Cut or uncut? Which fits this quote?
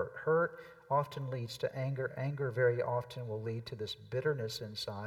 uncut